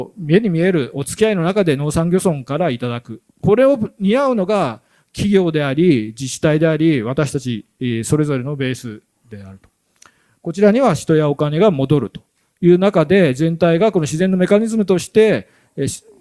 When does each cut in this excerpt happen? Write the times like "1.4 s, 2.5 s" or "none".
none